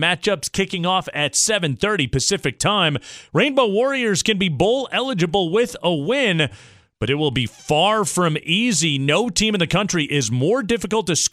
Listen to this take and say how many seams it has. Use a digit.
1